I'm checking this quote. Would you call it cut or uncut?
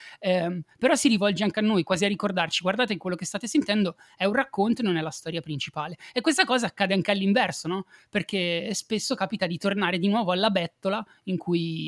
uncut